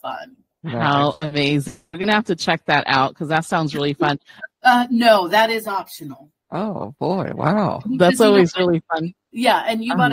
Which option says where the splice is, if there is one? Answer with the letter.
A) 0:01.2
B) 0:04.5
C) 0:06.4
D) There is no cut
B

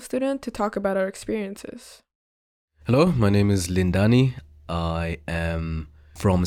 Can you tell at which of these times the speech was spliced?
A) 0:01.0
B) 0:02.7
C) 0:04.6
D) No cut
D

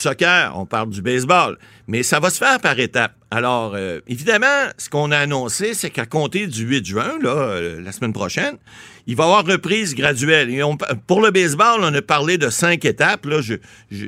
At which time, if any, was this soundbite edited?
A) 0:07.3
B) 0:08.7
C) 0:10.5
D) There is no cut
D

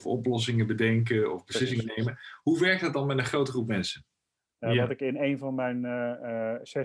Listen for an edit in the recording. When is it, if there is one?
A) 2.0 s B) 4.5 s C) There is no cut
B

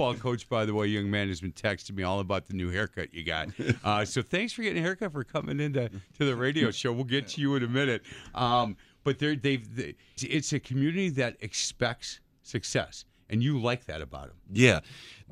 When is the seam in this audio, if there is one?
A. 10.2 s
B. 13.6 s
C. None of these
A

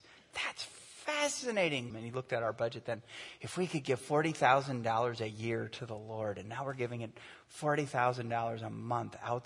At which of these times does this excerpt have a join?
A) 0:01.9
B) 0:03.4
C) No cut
A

